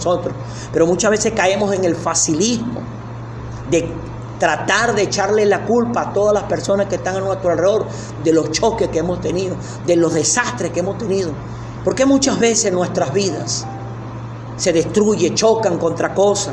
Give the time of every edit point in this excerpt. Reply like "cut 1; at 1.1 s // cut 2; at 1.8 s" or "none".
cut 1; at 8.2 s // cut 2; at 11.8 s